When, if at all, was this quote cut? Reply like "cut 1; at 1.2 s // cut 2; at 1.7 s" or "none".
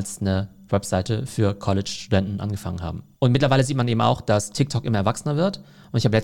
none